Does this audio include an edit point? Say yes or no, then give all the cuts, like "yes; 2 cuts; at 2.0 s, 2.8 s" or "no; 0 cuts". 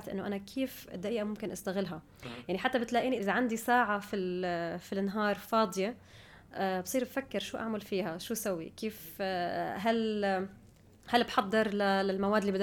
yes; 1 cut; at 3.2 s